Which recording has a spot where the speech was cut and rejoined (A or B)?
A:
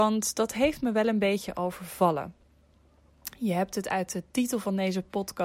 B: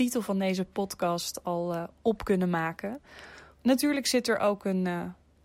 B